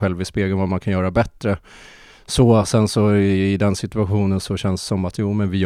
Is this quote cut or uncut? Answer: uncut